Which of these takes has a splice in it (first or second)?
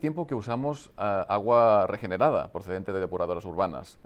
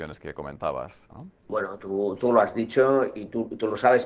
second